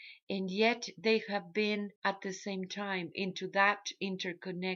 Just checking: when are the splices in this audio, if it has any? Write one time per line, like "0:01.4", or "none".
0:02.0